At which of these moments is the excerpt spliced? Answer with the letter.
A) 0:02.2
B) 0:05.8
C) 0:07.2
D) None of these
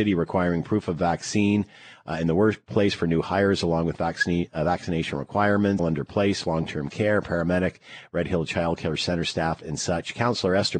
B